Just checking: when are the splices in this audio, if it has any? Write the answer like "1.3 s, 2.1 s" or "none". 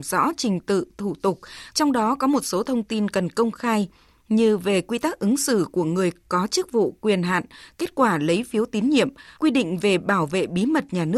1.7 s, 9.4 s